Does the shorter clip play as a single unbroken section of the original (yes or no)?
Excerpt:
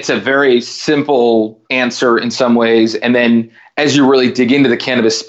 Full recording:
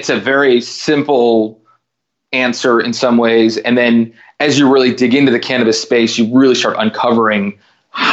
no